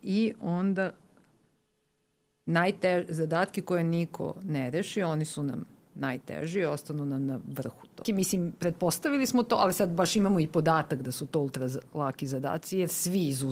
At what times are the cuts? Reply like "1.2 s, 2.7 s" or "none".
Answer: 8.0 s

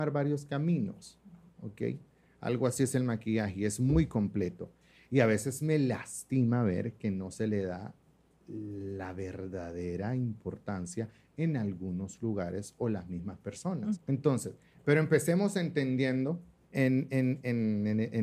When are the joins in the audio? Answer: 14.0 s, 16.7 s

